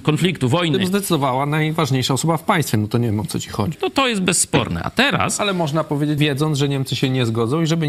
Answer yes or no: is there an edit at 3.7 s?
yes